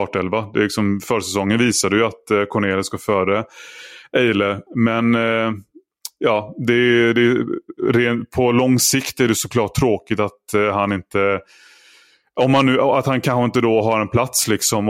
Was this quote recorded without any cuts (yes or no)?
no